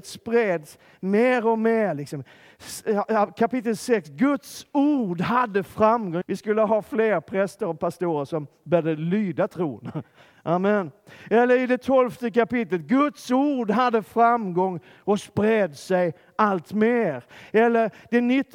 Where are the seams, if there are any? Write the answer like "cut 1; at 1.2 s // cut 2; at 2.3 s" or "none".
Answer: cut 1; at 6.2 s